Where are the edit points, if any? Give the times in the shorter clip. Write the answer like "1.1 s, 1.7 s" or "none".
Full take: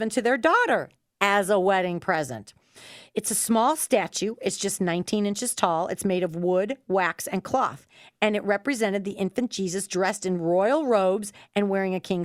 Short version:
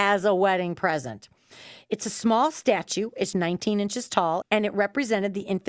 3.3 s, 4.4 s